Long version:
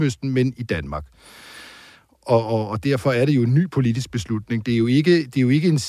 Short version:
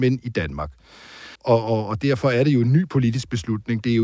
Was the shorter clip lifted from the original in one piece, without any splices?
no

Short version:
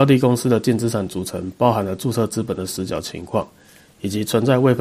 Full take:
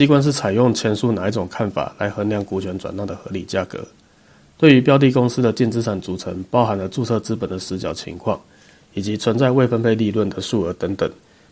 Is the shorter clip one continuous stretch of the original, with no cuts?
yes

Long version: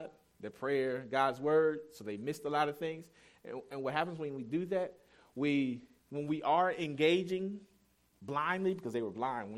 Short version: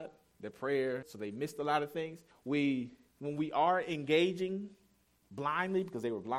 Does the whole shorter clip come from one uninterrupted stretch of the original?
no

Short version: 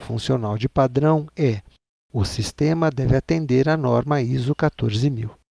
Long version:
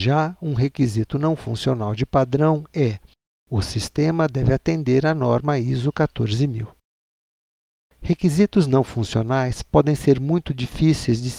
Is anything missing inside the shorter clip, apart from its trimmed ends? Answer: no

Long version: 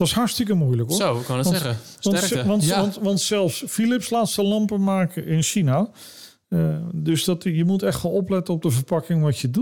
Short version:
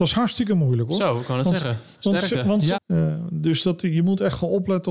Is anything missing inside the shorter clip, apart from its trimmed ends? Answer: yes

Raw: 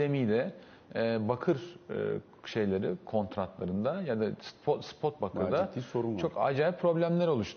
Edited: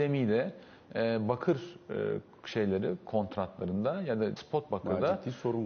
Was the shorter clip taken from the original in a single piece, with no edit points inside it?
no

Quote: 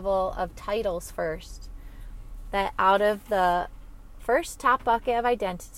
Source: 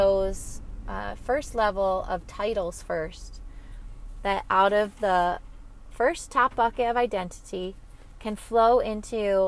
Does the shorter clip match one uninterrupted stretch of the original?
yes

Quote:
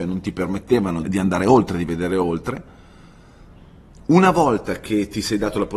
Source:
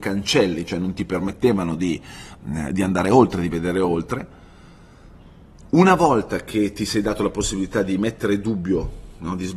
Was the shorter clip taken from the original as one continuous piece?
no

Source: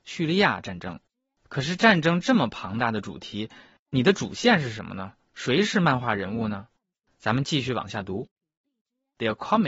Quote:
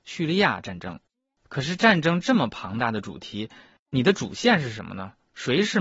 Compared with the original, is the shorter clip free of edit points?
yes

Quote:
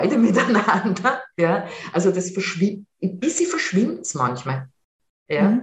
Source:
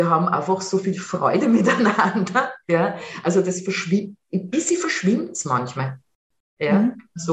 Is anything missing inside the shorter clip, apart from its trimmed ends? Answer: no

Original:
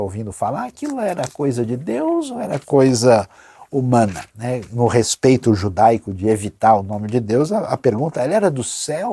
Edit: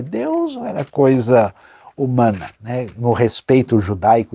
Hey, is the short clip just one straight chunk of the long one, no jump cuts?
yes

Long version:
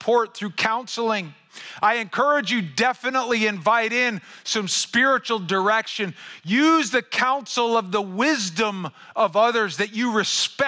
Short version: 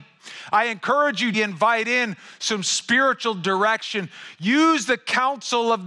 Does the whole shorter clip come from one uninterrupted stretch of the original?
no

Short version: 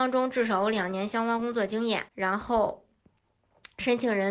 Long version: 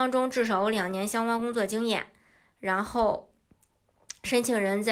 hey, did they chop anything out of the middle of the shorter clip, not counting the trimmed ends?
yes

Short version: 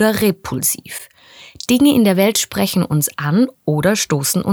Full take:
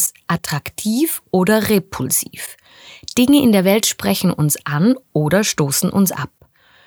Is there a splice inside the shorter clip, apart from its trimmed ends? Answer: no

